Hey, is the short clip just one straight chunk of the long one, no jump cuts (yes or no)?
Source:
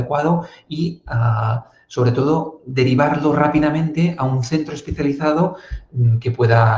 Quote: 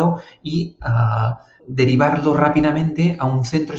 no